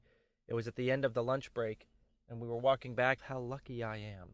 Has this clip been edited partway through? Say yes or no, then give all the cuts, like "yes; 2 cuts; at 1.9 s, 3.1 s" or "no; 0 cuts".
yes; 1 cut; at 3.2 s